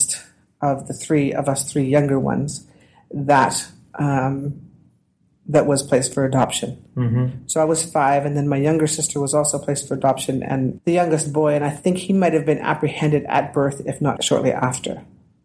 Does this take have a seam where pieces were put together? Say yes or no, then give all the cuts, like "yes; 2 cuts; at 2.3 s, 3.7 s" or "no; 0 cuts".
yes; 2 cuts; at 10.8 s, 14.2 s